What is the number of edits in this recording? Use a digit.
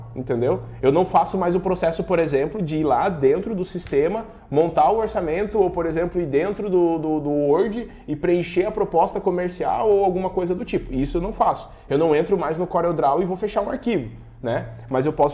0